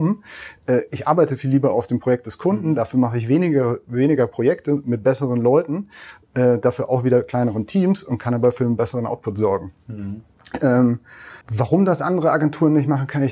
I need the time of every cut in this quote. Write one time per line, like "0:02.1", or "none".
0:11.4